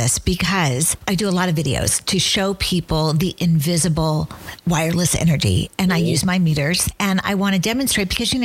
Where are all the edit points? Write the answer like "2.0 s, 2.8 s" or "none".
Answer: none